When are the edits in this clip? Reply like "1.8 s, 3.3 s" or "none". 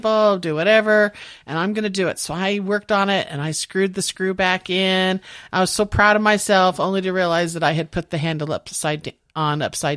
none